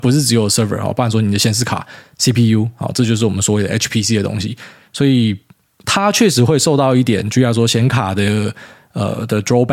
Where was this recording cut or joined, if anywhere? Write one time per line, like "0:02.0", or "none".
none